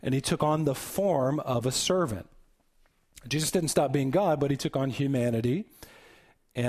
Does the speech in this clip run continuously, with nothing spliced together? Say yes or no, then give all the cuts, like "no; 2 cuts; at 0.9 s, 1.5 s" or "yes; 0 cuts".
yes; 0 cuts